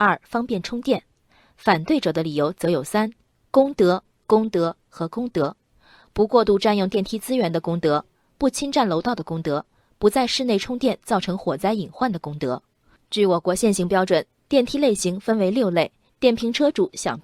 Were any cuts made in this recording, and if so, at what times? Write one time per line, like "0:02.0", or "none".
0:16.1